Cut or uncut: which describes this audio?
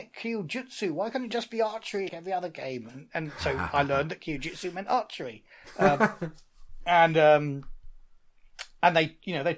cut